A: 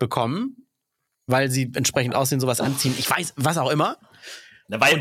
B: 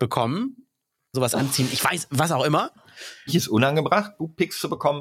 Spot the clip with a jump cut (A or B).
B